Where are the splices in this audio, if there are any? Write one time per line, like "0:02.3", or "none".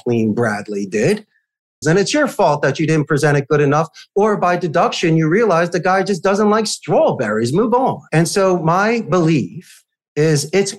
0:01.8
0:08.1